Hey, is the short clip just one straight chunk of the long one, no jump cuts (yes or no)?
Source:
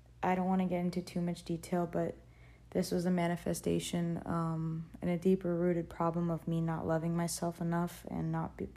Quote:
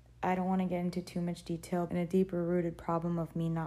no